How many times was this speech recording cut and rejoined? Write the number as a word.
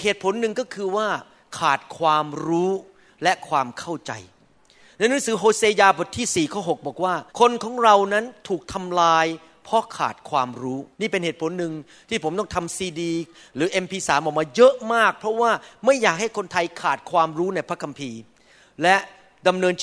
two